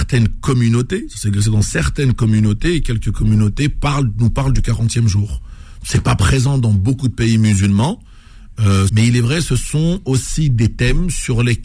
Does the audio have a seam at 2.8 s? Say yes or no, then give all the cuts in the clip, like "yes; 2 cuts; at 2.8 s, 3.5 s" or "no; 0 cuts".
no; 1 cut; at 8.9 s